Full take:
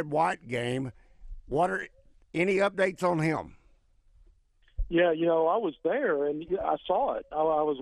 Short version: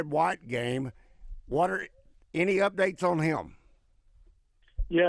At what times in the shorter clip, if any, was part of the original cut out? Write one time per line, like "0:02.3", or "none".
none